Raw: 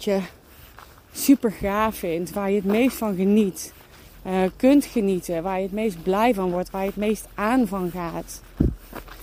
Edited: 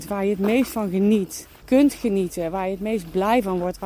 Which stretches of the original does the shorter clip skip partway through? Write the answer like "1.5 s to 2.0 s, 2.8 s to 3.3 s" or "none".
3.9 s to 4.5 s